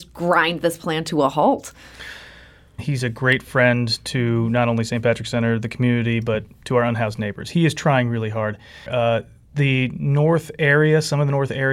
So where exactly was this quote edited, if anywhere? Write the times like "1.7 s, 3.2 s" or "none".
2.8 s, 8.9 s